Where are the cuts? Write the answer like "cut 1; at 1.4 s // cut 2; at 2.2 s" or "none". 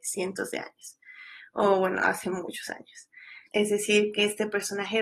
cut 1; at 3.5 s